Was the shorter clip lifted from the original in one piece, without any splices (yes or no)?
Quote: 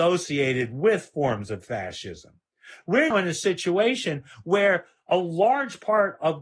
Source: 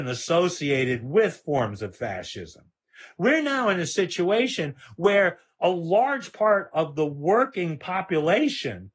no